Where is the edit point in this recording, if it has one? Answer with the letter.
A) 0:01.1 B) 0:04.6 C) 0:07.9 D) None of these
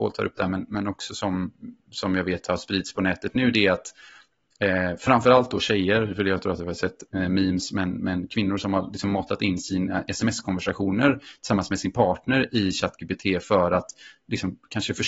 D